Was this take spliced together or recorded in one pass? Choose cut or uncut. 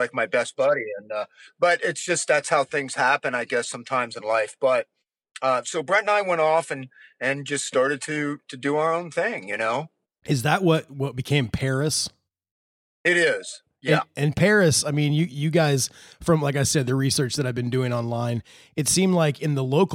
uncut